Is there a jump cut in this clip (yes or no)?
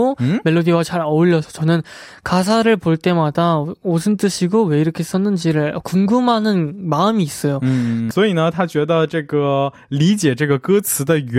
yes